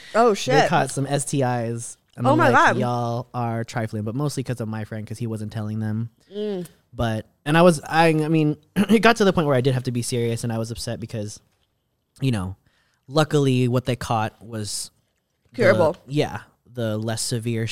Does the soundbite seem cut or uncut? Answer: uncut